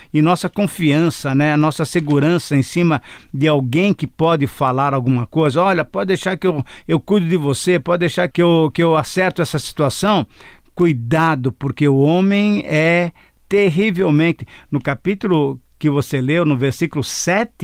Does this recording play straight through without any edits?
yes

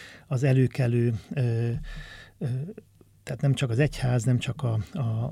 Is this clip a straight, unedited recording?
yes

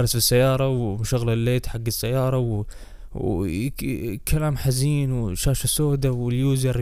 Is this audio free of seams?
yes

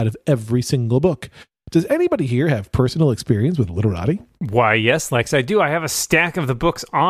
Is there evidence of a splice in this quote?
no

